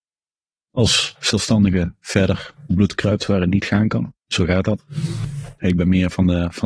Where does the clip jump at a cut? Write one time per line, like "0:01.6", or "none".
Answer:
0:04.2
0:05.6